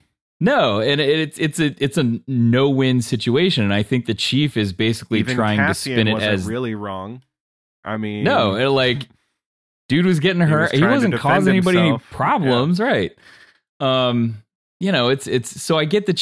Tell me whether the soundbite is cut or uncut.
uncut